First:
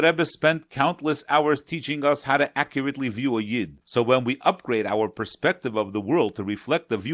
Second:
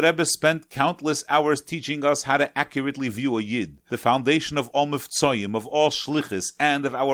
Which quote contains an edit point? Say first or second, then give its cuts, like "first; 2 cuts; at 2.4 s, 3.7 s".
first; 1 cut; at 3.8 s